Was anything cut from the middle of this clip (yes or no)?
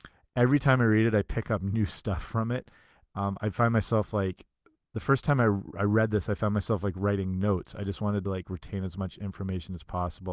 no